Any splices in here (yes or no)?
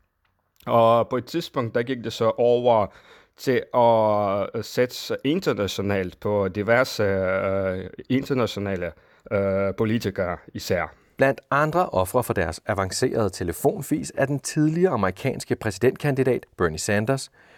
no